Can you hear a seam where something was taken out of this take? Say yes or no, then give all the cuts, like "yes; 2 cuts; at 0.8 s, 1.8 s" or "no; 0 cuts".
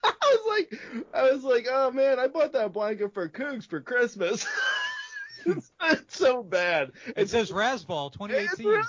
no; 0 cuts